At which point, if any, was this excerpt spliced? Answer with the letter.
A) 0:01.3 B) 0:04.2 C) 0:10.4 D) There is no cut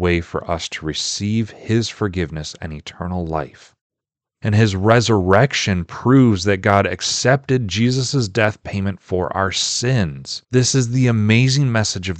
B